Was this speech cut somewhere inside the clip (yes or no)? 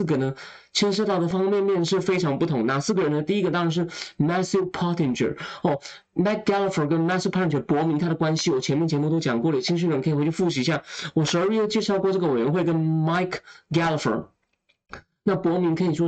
yes